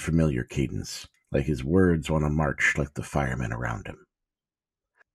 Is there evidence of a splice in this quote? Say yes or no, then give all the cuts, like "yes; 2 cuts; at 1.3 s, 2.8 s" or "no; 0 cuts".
yes; 1 cut; at 2.8 s